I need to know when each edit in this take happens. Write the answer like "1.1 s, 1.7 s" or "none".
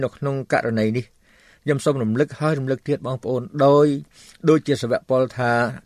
none